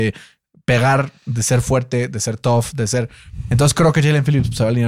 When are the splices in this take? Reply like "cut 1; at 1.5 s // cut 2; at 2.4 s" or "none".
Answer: none